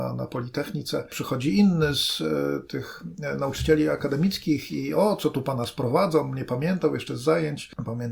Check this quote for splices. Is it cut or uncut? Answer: uncut